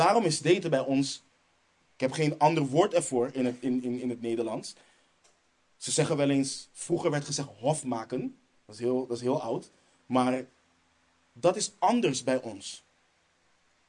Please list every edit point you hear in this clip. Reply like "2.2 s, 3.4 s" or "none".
none